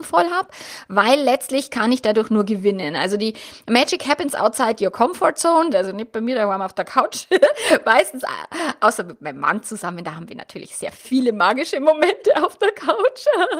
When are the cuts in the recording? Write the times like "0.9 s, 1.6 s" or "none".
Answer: 5.7 s